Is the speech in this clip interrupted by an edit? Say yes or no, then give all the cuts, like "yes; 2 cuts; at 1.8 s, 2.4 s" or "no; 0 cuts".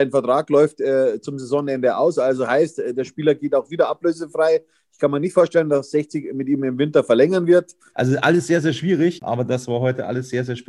yes; 2 cuts; at 7.9 s, 9.2 s